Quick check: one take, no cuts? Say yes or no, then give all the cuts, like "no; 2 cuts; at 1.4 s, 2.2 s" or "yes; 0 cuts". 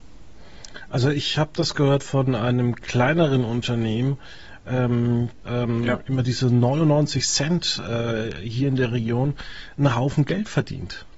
no; 1 cut; at 5.4 s